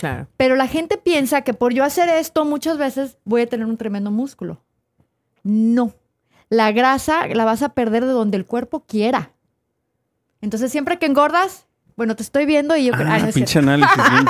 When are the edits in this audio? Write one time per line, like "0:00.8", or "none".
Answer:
0:10.3